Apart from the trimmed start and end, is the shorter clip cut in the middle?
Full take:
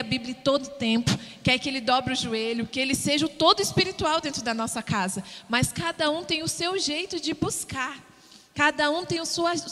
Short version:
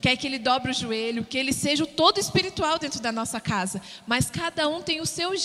no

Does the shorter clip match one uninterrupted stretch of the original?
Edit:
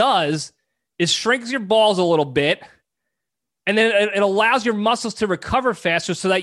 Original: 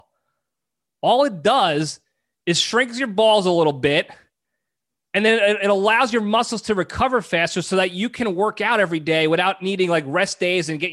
yes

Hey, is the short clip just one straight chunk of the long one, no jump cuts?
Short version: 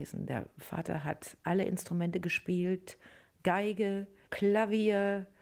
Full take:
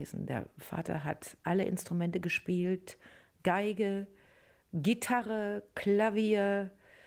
no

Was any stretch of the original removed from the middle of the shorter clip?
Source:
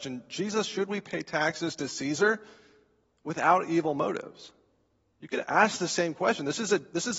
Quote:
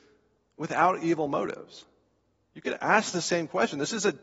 no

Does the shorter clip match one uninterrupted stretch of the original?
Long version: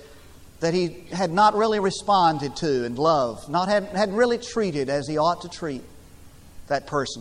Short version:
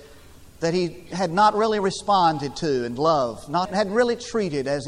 no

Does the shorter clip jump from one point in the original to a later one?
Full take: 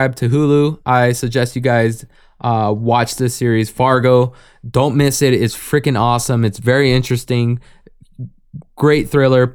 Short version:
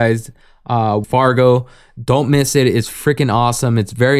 yes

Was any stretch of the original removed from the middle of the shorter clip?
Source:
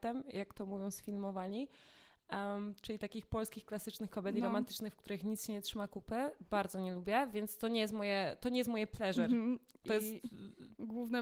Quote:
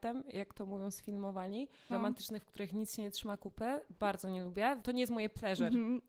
yes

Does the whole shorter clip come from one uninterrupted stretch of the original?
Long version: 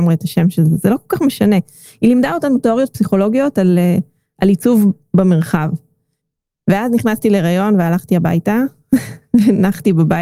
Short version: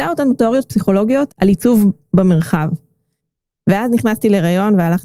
no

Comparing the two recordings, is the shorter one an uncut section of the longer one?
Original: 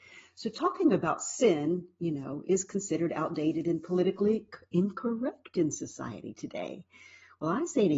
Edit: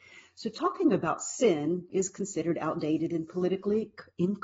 no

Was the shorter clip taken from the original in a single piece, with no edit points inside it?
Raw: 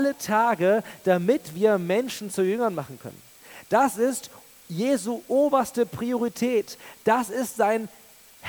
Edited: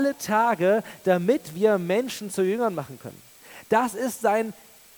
no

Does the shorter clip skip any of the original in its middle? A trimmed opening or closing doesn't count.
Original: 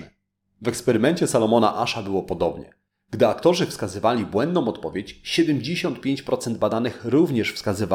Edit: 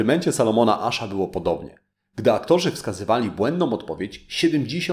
no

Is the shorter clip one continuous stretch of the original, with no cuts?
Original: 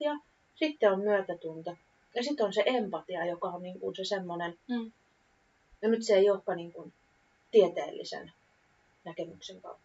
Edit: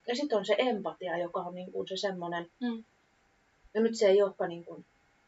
yes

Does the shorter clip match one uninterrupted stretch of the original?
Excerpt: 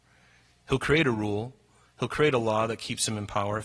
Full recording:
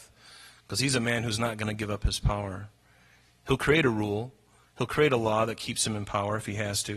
yes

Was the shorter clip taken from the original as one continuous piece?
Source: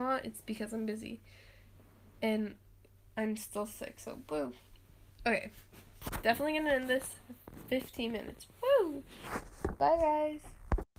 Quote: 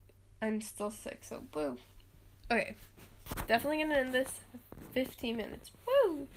yes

